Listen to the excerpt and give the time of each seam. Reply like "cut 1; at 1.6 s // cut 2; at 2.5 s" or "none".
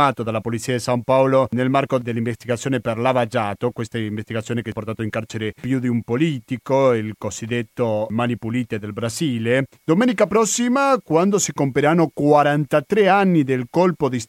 cut 1; at 9.7 s